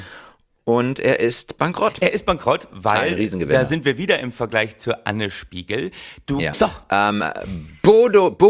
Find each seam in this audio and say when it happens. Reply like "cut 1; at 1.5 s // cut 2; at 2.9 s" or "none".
cut 1; at 2.7 s // cut 2; at 6.5 s